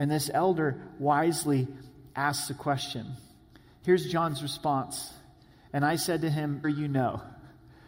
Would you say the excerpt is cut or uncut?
cut